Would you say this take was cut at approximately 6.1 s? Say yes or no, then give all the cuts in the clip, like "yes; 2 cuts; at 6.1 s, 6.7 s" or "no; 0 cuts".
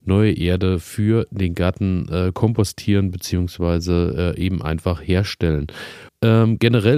yes; 1 cut; at 6.1 s